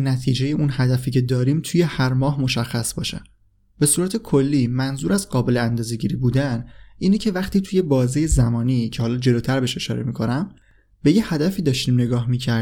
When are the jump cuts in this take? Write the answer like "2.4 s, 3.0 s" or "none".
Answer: none